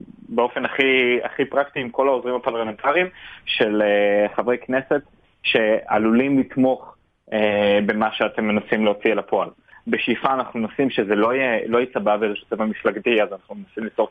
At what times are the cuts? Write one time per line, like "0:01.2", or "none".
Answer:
none